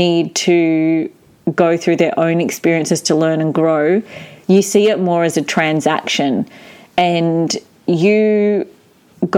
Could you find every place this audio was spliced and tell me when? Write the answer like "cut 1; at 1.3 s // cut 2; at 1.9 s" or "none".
none